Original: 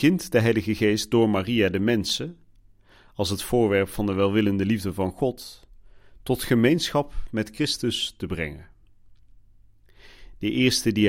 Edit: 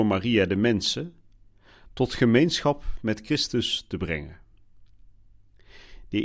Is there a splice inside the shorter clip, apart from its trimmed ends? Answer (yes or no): yes